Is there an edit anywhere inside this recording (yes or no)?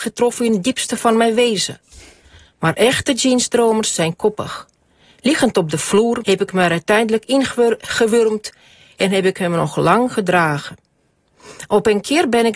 yes